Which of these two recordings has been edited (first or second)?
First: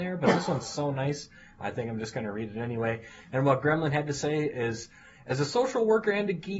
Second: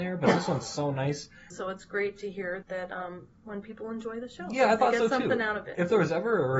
second